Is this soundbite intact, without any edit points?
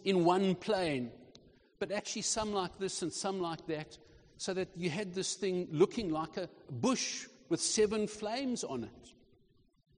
yes; 0 cuts

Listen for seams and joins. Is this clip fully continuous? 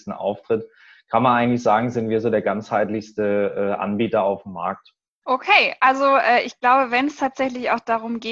no; 1 cut; at 5.2 s

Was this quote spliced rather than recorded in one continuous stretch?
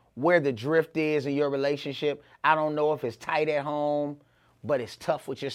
no; 0 cuts

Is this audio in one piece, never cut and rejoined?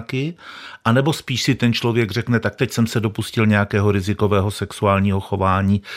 yes; 0 cuts

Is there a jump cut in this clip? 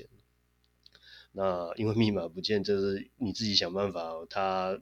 yes; 1 cut; at 1.2 s

